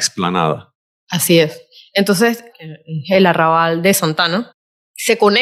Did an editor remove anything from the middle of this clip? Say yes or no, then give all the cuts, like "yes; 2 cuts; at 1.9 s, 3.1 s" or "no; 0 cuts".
yes; 1 cut; at 2.5 s